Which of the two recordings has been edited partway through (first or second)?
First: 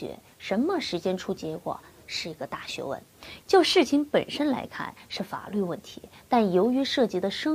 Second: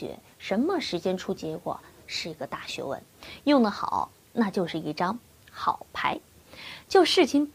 first